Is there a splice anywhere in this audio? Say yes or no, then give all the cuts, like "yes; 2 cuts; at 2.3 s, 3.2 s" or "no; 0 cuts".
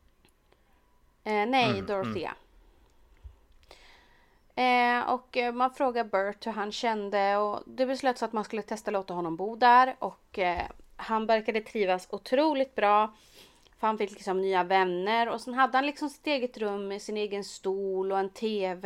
no; 0 cuts